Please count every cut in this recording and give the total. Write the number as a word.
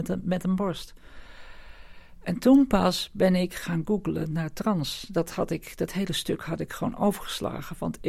zero